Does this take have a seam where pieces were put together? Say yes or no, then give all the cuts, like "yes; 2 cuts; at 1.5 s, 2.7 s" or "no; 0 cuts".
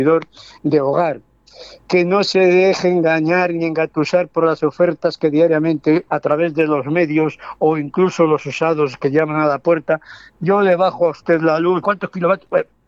yes; 2 cuts; at 6.1 s, 11.8 s